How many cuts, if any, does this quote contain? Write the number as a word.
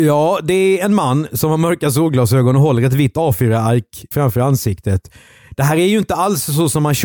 one